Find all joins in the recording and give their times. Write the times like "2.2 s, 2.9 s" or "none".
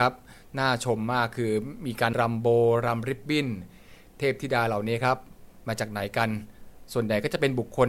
2.1 s